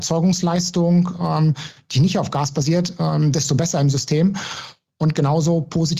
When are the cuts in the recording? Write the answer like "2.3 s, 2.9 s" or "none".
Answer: none